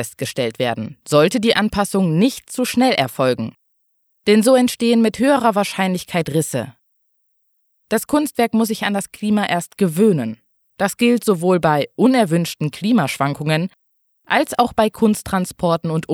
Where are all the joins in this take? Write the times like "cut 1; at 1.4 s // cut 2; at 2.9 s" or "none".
none